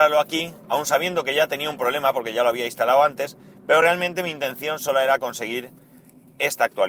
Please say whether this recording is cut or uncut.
uncut